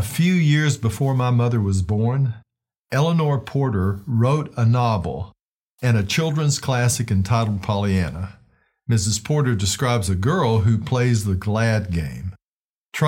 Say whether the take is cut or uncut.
uncut